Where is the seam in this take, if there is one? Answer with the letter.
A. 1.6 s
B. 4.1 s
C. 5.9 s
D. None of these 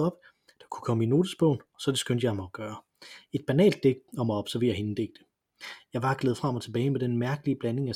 B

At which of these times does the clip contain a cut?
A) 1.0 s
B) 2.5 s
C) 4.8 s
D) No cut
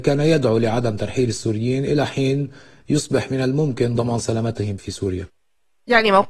C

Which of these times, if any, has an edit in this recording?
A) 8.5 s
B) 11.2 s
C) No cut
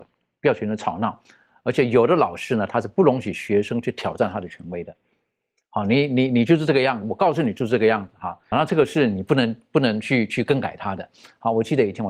A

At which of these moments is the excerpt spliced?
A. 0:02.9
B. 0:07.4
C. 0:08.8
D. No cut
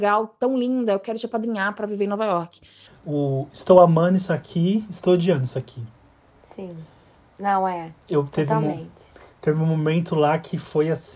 A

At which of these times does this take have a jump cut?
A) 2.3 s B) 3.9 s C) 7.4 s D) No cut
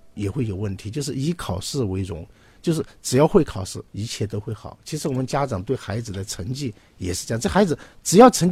B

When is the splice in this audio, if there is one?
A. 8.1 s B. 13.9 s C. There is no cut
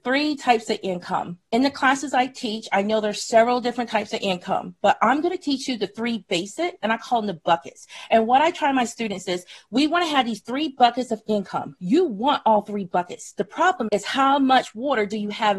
B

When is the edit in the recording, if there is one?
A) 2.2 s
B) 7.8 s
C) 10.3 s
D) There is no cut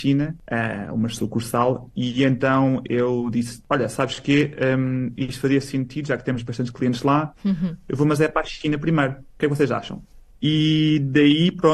C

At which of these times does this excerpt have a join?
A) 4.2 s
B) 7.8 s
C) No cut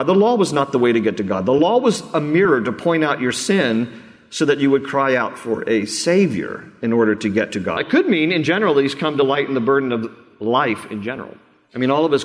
B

